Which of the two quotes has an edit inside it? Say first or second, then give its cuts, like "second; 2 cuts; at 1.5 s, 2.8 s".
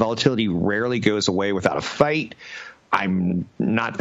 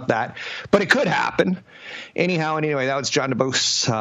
first; 1 cut; at 2.8 s